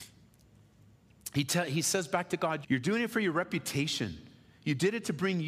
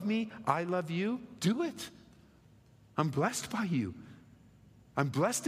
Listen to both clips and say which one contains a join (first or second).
first